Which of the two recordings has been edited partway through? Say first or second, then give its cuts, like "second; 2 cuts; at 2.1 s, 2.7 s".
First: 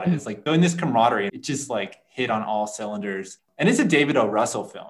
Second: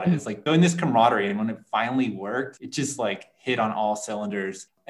first; 1 cut; at 1.3 s